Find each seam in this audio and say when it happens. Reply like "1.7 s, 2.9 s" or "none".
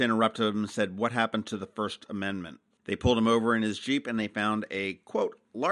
2.8 s